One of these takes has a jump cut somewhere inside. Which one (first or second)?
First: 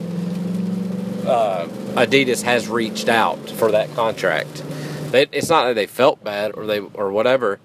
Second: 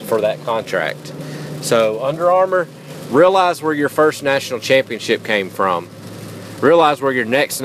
first